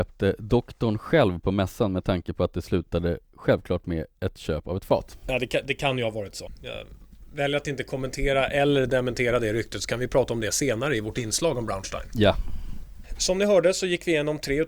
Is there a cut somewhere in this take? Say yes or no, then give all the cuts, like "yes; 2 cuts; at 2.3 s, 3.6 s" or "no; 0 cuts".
no; 0 cuts